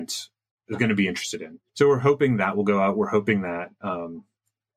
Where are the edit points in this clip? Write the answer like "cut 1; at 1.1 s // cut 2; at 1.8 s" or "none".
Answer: cut 1; at 1.7 s